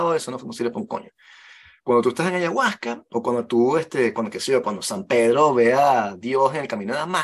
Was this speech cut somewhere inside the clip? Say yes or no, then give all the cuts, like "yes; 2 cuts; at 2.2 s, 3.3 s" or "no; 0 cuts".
no; 0 cuts